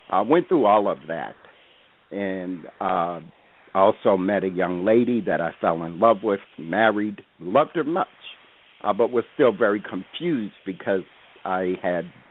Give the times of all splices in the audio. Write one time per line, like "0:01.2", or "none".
0:07.8